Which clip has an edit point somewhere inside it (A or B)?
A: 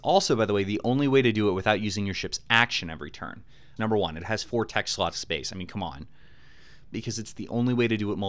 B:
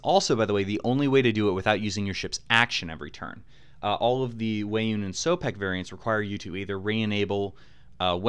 A